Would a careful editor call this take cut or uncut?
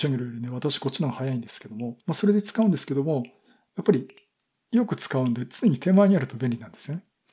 cut